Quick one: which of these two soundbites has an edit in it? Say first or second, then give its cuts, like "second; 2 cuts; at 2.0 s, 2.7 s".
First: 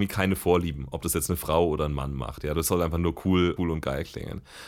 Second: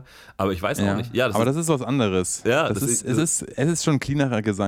first; 2 cuts; at 2.5 s, 3.6 s